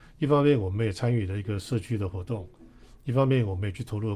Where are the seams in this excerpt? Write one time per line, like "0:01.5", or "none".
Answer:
none